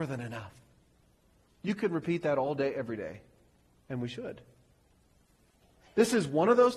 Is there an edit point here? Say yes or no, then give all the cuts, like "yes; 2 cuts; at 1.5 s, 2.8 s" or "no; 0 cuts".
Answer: yes; 1 cut; at 5.9 s